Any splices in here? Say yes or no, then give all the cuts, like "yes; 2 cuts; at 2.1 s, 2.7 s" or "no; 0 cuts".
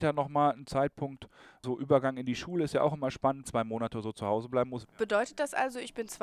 yes; 2 cuts; at 3.4 s, 4.8 s